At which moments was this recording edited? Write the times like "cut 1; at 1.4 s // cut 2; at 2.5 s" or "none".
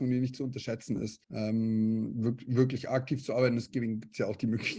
cut 1; at 1.2 s